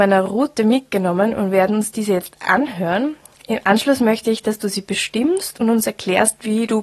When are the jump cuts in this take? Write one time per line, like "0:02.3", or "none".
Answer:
none